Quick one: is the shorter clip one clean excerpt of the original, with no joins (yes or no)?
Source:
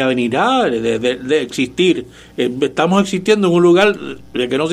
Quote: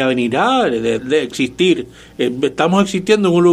no